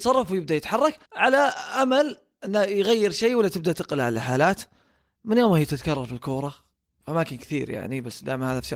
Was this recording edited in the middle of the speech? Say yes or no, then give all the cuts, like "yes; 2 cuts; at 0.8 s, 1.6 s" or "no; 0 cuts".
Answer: yes; 1 cut; at 1.1 s